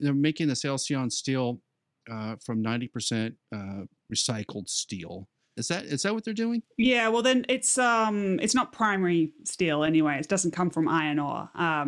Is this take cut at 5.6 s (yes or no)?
yes